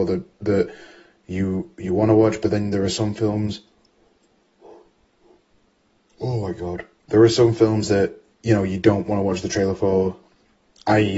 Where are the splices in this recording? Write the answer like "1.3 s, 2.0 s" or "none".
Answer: none